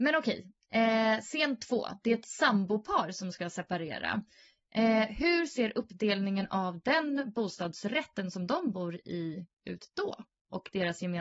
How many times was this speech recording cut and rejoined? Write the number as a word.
zero